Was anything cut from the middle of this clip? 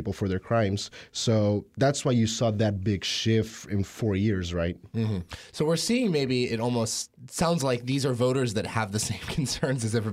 no; 0 cuts

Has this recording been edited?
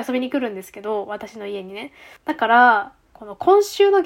yes; 1 cut; at 2.2 s

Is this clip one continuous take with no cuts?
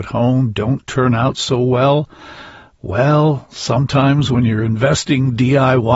yes; 0 cuts

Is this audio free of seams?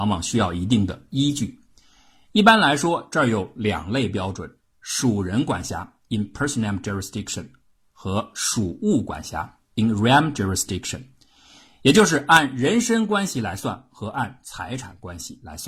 yes; 0 cuts

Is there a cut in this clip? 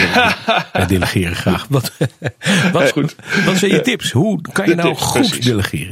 yes; 1 cut; at 2.9 s

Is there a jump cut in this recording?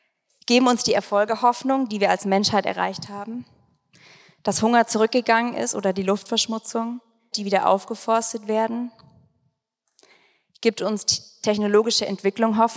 yes; 1 cut; at 7.3 s

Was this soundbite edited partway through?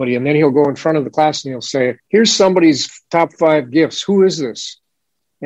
yes; 1 cut; at 2.0 s

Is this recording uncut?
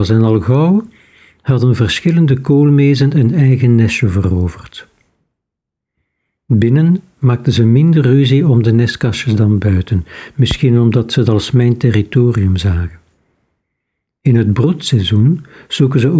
yes; 0 cuts

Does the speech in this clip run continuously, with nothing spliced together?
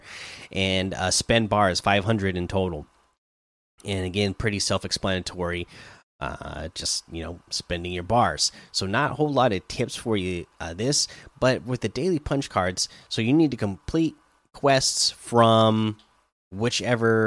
yes; 0 cuts

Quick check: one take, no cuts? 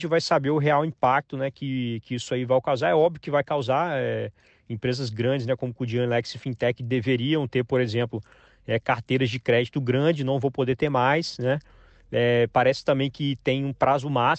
yes; 0 cuts

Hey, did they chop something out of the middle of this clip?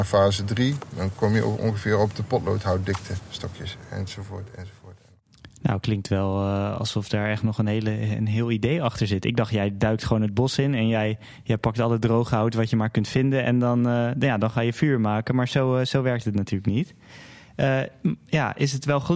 no; 0 cuts

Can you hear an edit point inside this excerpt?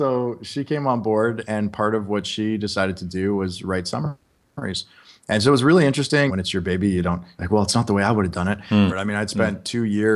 yes; 2 cuts; at 6.3 s, 8.9 s

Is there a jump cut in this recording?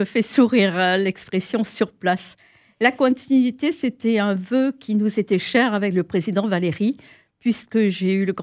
no; 0 cuts

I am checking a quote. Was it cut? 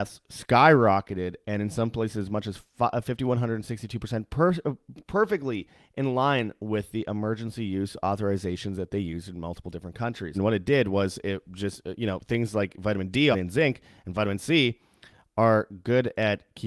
yes; 2 cuts; at 10.3 s, 13.3 s

